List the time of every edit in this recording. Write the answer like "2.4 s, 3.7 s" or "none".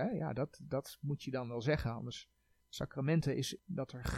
2.6 s

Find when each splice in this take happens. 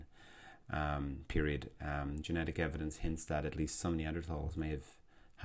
2.2 s

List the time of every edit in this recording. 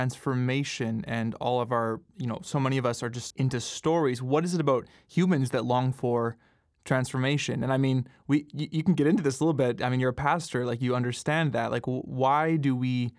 3.3 s

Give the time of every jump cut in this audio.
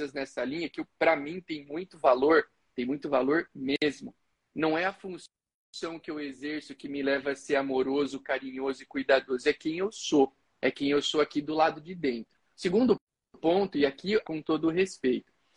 12.4 s, 14.2 s

